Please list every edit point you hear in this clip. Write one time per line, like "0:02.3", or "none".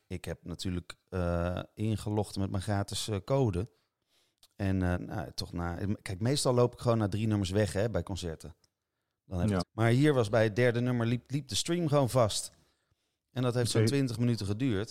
0:04.9
0:09.6